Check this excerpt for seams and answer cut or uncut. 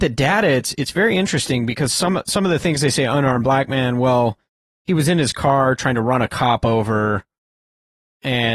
uncut